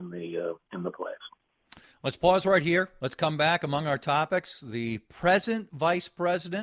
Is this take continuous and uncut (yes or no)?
yes